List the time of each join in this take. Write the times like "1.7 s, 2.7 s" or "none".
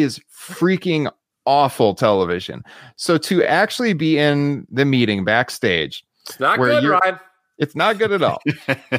none